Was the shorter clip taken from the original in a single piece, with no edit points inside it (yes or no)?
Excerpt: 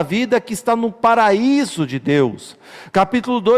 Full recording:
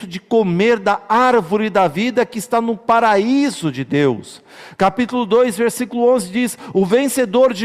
yes